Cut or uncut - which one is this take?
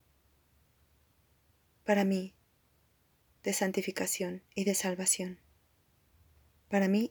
cut